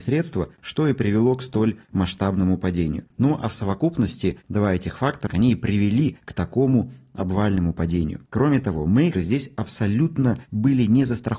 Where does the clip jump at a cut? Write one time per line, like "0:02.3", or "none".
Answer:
0:05.3
0:09.1